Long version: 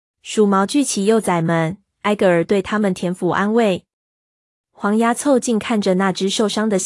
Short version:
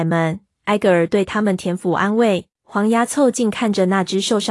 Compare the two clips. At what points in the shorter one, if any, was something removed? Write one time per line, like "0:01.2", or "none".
0:02.5

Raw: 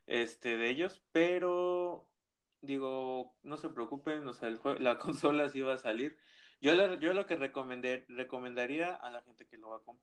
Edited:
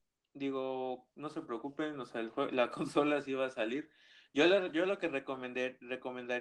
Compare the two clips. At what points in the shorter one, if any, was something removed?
none

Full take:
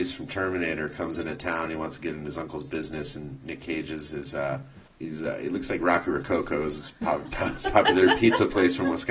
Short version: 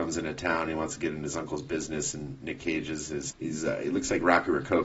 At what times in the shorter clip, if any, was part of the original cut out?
0:03.3

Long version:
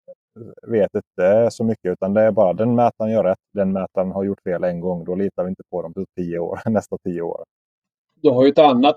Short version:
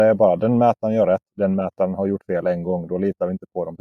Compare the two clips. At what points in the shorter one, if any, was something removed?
none

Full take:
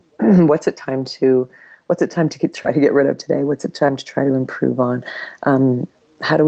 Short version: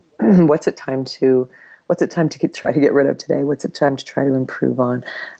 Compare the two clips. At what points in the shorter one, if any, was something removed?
none

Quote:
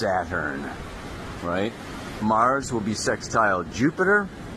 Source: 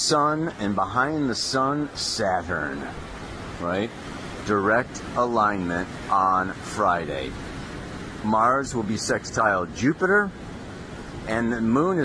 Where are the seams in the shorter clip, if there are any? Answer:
0:02.2

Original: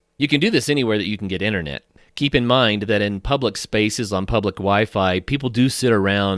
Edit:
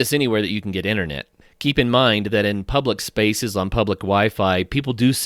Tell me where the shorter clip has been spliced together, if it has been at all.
none

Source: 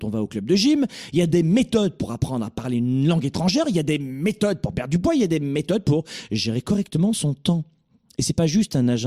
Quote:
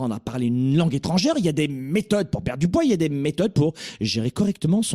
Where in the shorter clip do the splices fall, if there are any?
none

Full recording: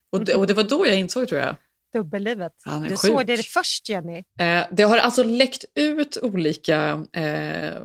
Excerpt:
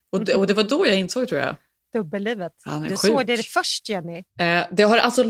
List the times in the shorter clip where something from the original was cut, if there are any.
none

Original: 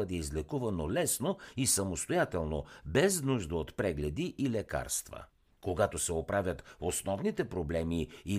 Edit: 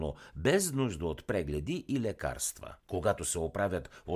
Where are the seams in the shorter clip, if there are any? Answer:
0:02.8

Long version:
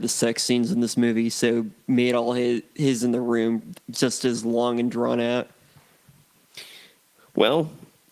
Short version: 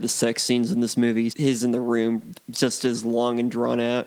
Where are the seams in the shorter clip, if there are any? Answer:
0:01.3

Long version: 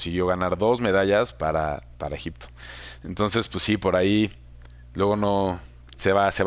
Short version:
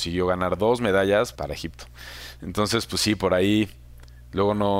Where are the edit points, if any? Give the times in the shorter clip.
0:01.3

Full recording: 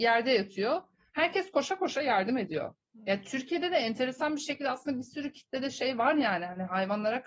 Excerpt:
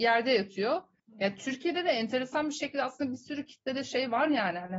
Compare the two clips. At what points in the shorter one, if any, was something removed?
0:01.0

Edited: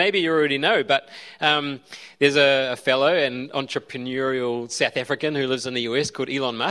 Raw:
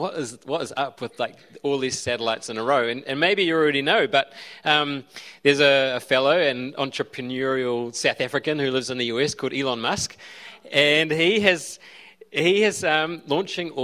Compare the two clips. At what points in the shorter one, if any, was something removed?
none

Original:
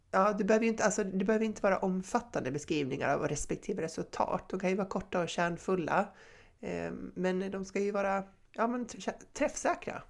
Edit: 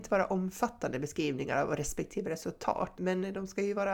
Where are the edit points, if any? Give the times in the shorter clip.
0:02.9

